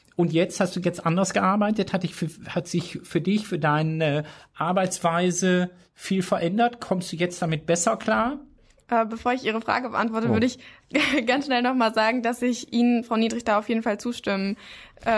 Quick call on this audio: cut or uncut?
uncut